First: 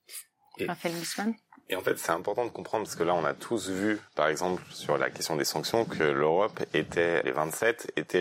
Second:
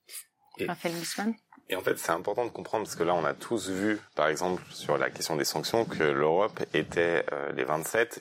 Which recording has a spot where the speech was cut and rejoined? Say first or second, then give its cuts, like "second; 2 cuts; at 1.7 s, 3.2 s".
first; 1 cut; at 7.2 s